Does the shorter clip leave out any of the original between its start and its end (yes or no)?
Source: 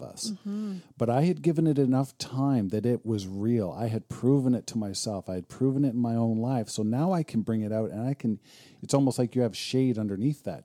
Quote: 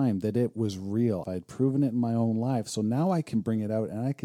yes